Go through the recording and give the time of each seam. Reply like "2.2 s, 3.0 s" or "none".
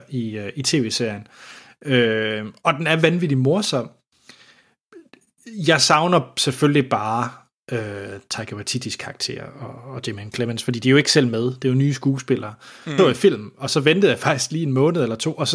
13.0 s